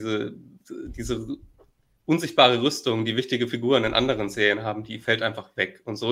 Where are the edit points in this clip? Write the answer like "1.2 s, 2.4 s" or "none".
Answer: none